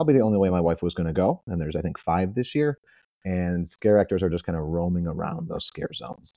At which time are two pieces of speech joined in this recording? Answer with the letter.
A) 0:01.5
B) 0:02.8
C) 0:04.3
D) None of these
A